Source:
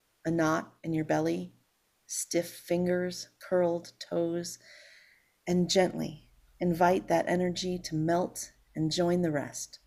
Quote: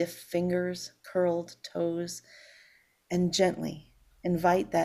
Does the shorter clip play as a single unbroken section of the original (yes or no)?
yes